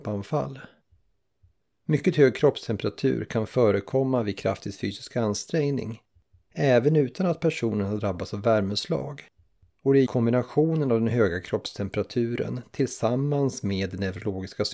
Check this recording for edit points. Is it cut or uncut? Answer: cut